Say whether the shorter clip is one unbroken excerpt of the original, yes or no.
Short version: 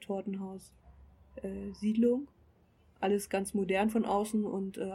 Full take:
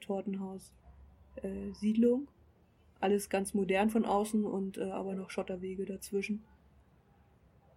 yes